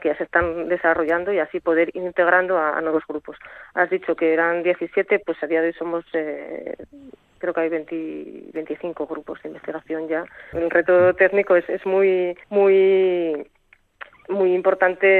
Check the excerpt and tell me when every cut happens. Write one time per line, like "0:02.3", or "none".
0:10.5
0:12.4